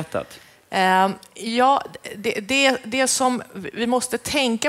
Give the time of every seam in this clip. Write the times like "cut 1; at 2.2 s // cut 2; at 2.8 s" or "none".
none

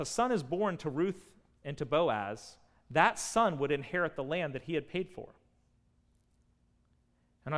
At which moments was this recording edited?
none

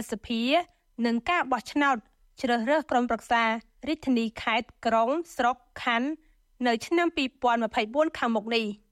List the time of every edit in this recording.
none

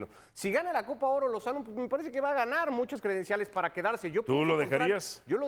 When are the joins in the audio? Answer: none

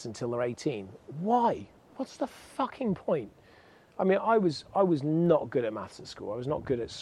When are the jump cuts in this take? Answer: none

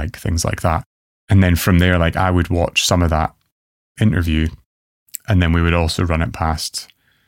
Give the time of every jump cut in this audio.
none

